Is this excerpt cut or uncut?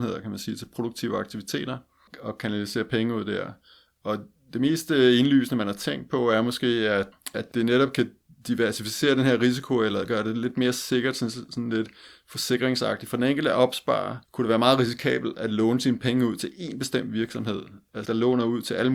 cut